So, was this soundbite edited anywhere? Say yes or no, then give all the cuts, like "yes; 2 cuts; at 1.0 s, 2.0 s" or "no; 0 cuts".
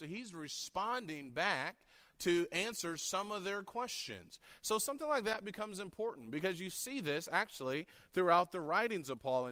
no; 0 cuts